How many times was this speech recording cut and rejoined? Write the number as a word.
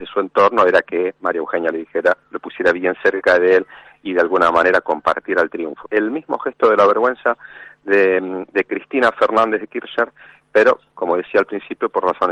one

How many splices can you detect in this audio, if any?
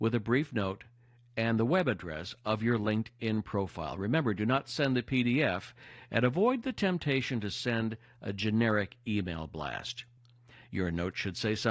zero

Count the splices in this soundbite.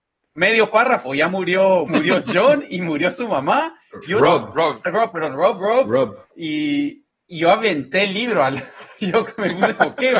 two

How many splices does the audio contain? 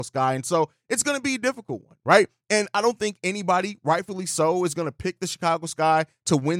zero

